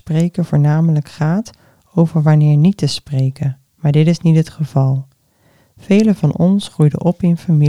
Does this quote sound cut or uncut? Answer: cut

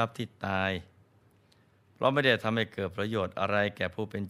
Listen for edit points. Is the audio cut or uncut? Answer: uncut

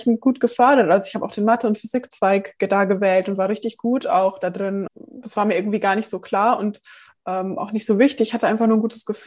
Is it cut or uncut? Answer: cut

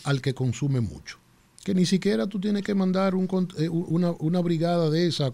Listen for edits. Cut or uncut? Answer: uncut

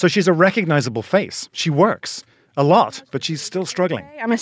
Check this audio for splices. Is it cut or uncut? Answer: uncut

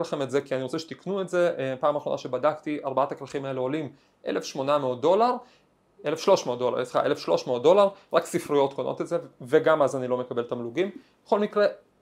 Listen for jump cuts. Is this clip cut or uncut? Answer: uncut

